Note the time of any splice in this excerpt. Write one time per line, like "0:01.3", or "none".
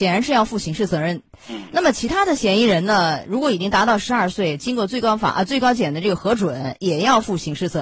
none